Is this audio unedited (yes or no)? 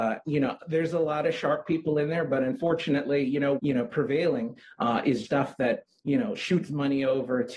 no